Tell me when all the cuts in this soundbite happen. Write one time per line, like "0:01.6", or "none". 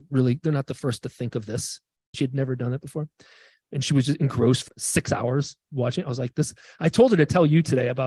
0:02.1
0:04.7